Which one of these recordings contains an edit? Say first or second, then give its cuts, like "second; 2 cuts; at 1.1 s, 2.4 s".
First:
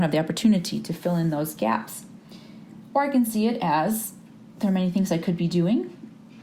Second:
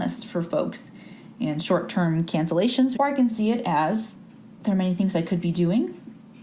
second; 1 cut; at 2.9 s